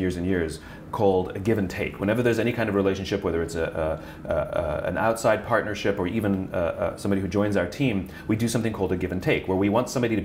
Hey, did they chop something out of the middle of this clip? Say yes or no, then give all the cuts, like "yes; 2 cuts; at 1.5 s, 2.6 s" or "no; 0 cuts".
no; 0 cuts